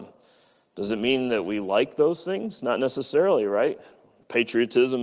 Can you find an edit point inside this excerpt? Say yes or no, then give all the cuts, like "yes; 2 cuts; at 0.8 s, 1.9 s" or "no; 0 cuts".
no; 0 cuts